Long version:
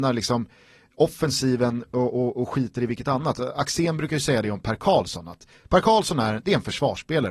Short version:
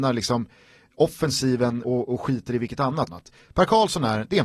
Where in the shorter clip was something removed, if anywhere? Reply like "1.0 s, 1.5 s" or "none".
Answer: 1.8 s, 3.1 s